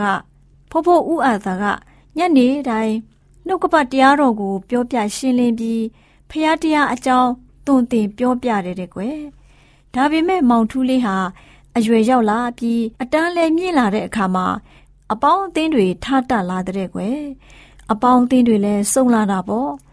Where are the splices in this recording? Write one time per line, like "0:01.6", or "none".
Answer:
0:12.9